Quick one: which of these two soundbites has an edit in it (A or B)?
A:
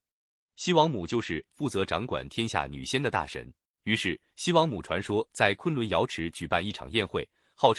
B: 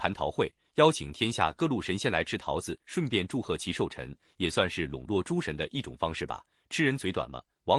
A